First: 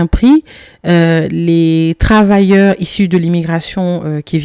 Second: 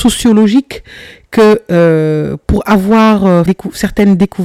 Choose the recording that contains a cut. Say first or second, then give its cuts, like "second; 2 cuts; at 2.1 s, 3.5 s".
second; 1 cut; at 3.5 s